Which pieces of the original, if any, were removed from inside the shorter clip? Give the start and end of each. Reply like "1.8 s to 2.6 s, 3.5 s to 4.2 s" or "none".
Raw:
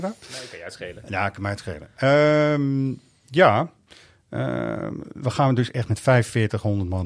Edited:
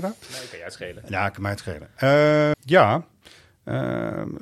2.5 s to 3.2 s